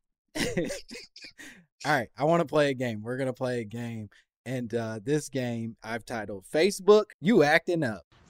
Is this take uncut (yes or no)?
no